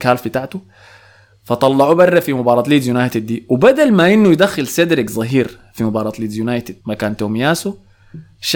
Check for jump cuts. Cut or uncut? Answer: cut